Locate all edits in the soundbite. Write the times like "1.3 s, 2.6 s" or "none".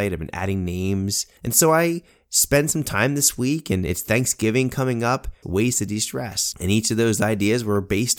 5.4 s